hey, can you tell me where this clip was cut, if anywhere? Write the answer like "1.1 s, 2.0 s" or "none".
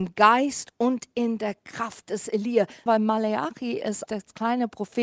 2.9 s, 4.1 s